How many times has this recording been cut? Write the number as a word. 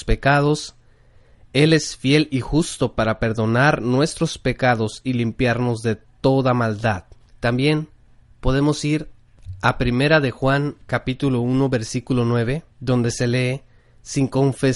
two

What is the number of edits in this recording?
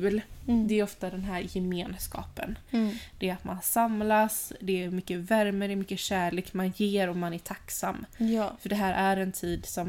zero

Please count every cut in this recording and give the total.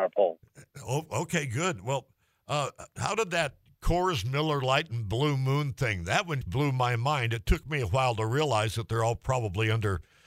one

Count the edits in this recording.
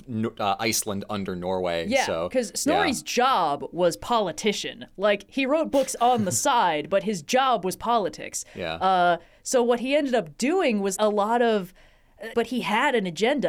two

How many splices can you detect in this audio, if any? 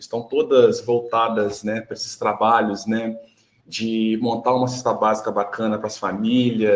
zero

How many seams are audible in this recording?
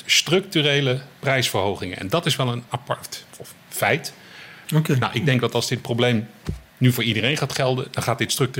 two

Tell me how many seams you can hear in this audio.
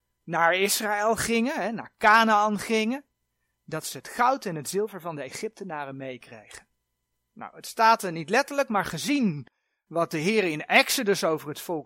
one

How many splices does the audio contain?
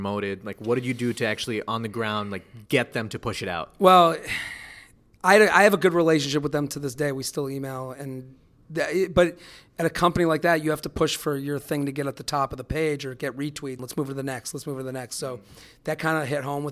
one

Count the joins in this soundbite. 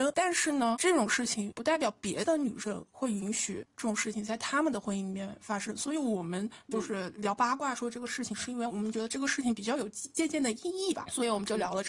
one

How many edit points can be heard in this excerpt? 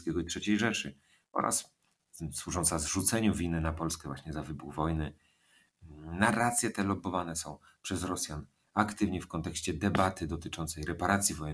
zero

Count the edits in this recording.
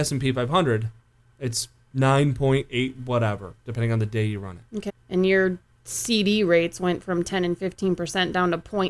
one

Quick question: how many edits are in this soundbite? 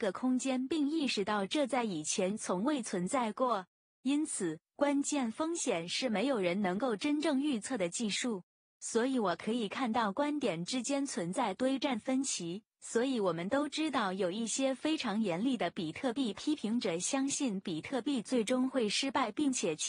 zero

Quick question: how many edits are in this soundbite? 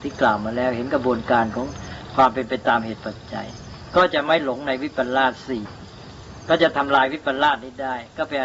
zero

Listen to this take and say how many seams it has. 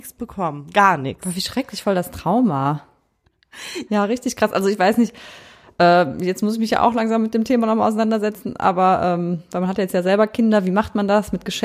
one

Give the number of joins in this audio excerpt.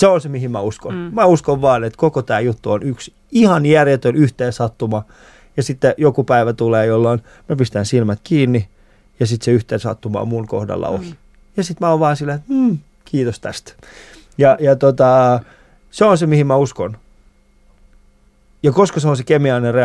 zero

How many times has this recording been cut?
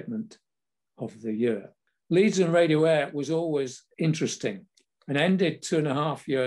one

